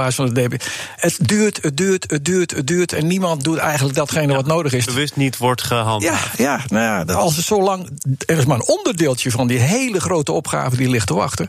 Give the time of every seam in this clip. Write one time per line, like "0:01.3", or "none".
0:04.9